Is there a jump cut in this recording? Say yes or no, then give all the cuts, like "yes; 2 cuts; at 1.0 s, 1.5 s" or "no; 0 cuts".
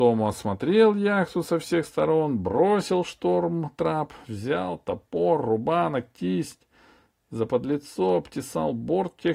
no; 0 cuts